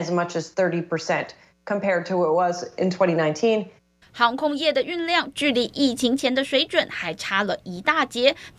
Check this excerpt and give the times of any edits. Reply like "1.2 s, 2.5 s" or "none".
4.0 s